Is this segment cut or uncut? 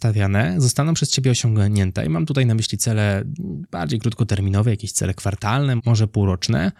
cut